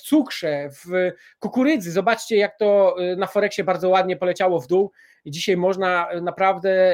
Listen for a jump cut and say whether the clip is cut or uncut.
uncut